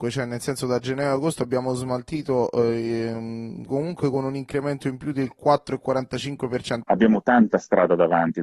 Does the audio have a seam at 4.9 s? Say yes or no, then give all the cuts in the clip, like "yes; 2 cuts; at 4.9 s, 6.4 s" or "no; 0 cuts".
no; 2 cuts; at 3.7 s, 6.8 s